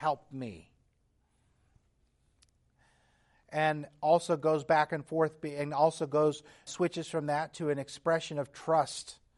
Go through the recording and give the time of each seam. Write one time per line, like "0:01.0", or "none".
0:06.7